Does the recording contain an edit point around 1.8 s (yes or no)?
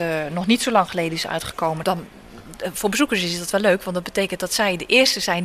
yes